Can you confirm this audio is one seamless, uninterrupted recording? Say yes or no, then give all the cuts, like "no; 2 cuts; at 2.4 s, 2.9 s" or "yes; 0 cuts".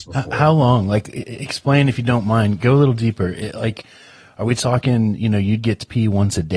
yes; 0 cuts